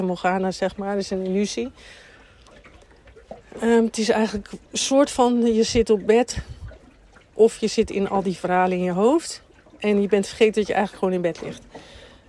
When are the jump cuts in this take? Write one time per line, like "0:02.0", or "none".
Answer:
0:04.7